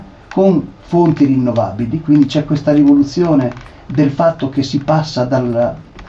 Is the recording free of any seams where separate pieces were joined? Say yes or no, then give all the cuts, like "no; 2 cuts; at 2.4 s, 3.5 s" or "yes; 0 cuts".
yes; 0 cuts